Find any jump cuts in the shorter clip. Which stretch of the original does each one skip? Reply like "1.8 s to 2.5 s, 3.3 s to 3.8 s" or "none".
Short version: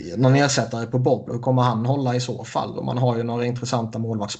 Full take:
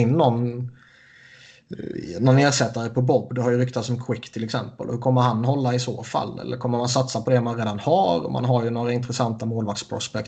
3.3 s to 4.8 s, 6.3 s to 8.2 s